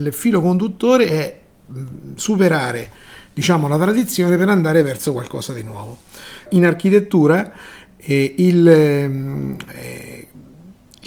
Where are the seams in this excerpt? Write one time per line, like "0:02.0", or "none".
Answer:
0:06.5